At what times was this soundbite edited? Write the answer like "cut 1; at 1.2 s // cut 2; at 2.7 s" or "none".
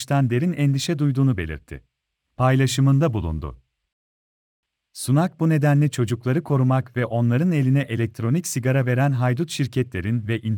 cut 1; at 2.2 s